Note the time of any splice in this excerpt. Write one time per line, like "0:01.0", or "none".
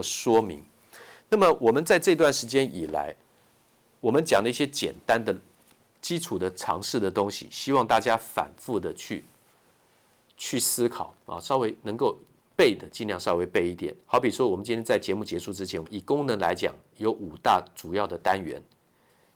0:14.0
0:15.8